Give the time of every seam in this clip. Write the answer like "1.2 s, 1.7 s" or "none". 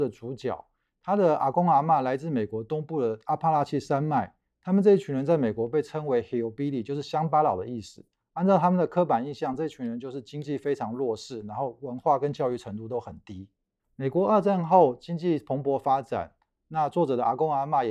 none